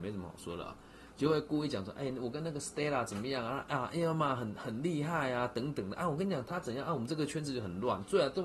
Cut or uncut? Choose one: uncut